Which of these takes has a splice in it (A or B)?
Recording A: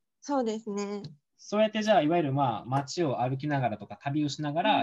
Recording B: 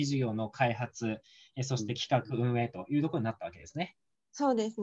A